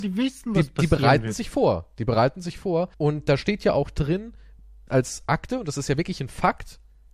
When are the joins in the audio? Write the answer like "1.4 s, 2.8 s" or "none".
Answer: 2.9 s, 4.9 s